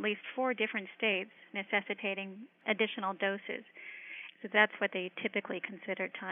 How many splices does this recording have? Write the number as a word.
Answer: two